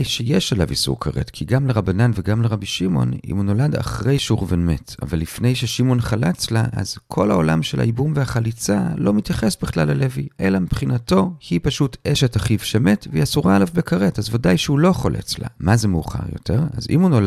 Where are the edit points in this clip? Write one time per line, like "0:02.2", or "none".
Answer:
0:15.6